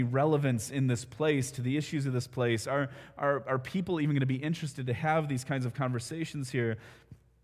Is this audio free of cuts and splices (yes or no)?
yes